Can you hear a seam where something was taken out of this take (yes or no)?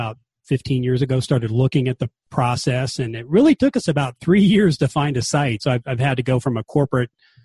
yes